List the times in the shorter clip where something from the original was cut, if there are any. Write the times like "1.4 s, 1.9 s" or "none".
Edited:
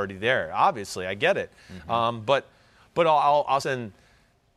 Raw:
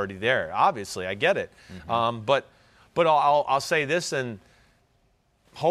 3.6 s